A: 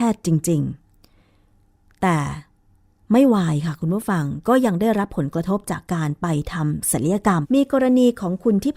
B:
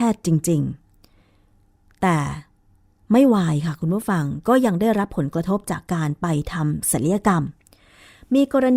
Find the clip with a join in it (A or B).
A